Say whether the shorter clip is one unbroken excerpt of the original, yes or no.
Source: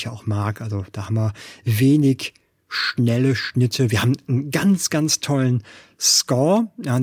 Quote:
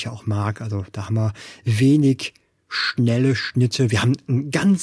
yes